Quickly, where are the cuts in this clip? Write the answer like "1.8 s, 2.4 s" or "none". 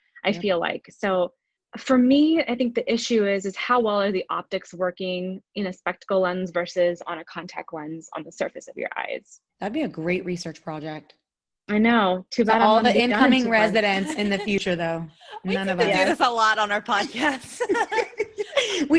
9.5 s